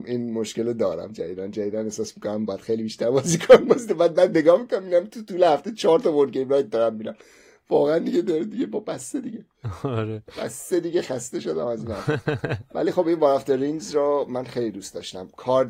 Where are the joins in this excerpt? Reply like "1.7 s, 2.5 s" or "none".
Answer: none

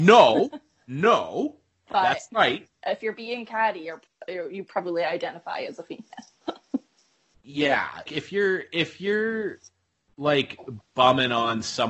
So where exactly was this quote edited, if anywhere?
4.1 s, 8.1 s

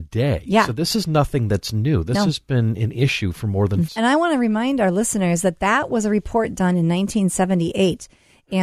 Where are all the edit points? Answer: 3.9 s

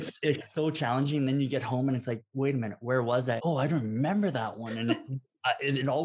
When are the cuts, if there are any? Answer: 3.4 s

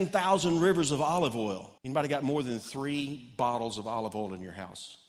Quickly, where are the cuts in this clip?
1.8 s

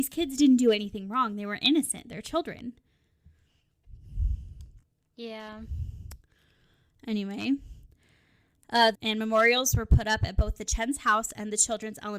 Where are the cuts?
8.9 s

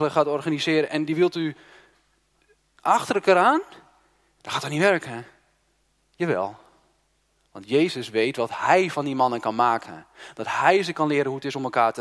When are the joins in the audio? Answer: none

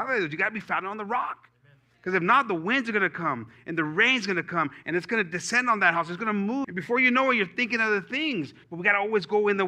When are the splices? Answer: 6.6 s, 8.6 s

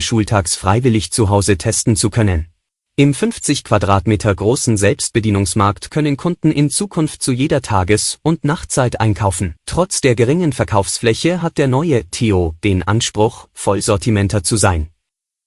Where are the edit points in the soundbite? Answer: 2.8 s, 9.6 s

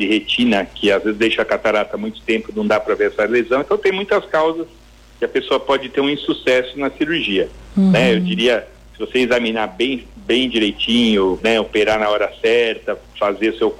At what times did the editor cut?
11.4 s

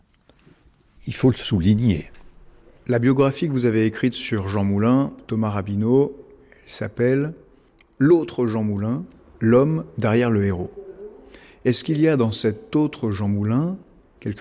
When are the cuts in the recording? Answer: 1.0 s

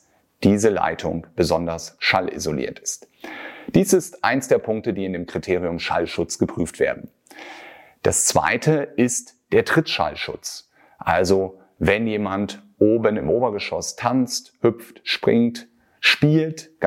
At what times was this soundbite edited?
none

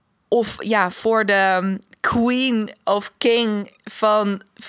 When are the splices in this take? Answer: none

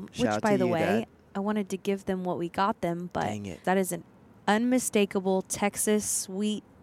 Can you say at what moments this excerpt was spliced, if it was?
3.6 s

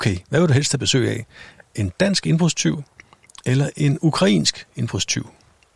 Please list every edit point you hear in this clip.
none

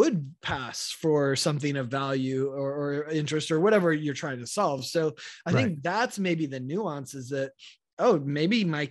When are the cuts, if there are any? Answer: none

